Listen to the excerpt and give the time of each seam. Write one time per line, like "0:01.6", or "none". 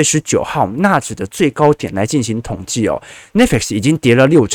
none